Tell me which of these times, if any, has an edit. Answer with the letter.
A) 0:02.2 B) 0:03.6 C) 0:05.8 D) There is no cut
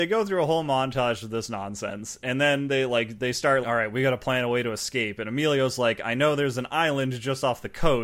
B